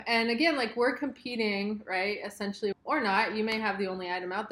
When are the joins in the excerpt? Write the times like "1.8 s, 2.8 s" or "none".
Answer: 2.7 s